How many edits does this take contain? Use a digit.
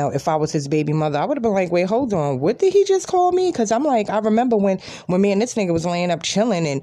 0